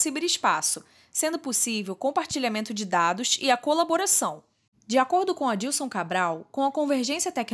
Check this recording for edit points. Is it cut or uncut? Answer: uncut